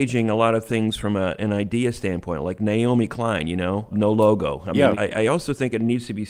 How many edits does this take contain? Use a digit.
2